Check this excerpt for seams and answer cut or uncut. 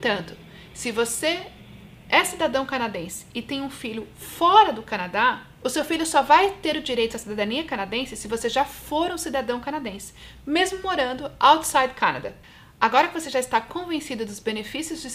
uncut